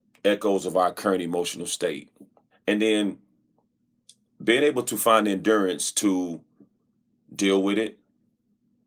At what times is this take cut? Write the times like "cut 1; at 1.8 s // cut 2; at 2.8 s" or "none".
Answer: cut 1; at 2.5 s